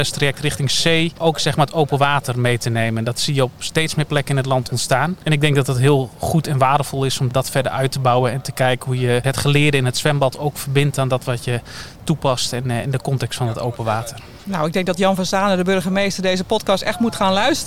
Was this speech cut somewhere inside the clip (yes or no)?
no